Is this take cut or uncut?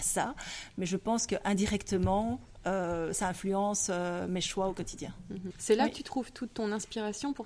cut